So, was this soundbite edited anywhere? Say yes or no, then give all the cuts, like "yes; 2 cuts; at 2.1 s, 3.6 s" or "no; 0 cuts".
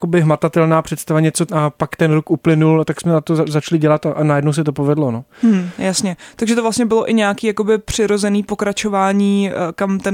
yes; 1 cut; at 1.5 s